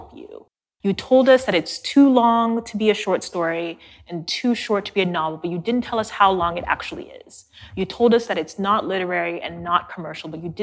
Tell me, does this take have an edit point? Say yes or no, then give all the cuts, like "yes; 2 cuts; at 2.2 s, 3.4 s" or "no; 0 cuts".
no; 0 cuts